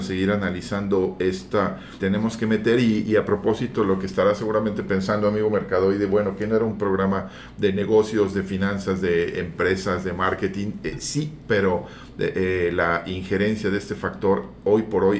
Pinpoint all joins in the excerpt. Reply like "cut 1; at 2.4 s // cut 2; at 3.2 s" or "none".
cut 1; at 2.0 s